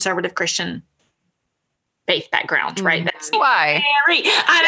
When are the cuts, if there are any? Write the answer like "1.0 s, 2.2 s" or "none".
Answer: 3.3 s